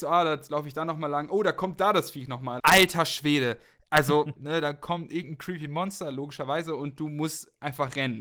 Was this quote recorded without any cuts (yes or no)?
no